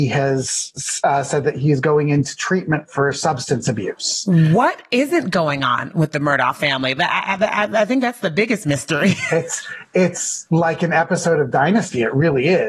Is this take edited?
no; 0 cuts

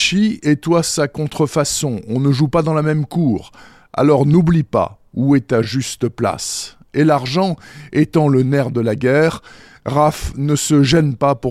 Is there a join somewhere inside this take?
no; 0 cuts

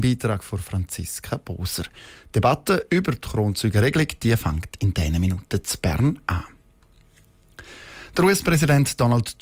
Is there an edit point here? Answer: no; 0 cuts

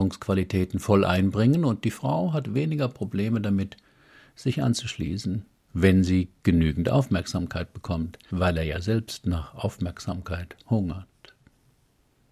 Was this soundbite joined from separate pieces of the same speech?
yes; 1 cut; at 8.3 s

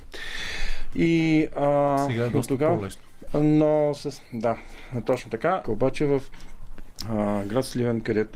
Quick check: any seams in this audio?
yes; 2 cuts; at 3.3 s, 5.6 s

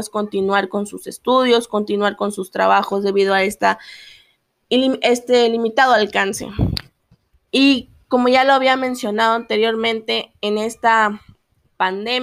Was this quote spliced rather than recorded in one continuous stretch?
yes; 1 cut; at 7.5 s

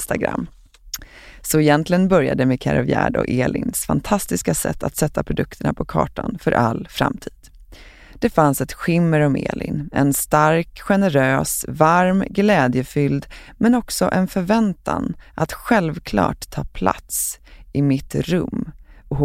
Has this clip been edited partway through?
no; 0 cuts

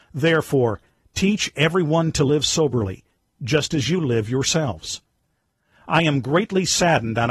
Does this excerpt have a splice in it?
no; 0 cuts

